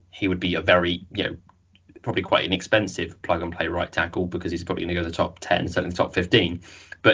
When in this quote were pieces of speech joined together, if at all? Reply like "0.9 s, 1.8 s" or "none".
none